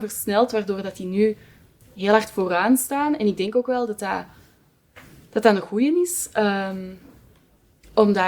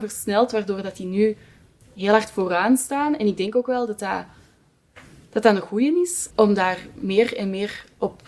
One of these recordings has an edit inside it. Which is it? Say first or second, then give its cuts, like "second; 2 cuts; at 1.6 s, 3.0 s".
second; 1 cut; at 6.3 s